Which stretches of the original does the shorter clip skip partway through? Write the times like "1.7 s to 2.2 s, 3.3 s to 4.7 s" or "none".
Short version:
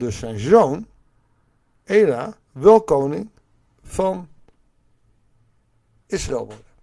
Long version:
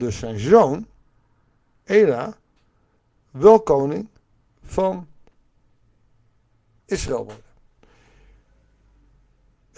2.4 s to 3.2 s